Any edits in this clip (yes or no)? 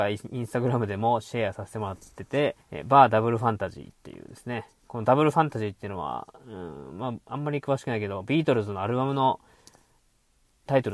yes